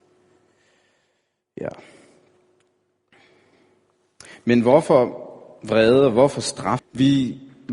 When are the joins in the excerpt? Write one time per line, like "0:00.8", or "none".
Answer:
0:06.8